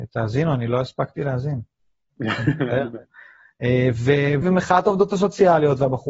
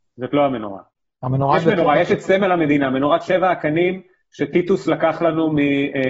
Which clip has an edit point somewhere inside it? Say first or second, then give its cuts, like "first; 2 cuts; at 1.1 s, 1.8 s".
first; 1 cut; at 4.4 s